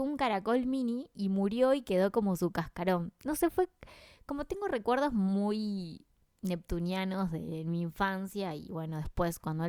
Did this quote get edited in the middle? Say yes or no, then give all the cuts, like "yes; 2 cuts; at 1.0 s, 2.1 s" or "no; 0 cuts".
no; 0 cuts